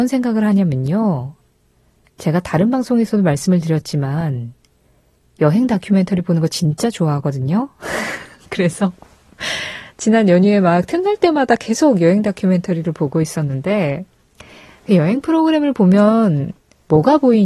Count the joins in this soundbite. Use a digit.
0